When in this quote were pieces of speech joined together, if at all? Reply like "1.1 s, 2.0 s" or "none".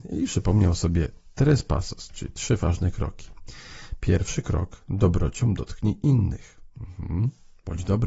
none